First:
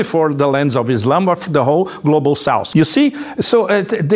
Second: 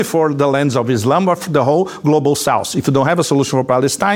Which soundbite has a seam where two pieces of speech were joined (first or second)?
first